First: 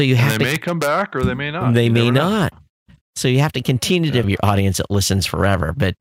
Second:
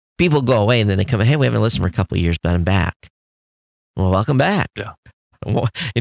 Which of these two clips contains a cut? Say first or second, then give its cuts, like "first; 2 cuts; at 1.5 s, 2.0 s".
first; 1 cut; at 4.2 s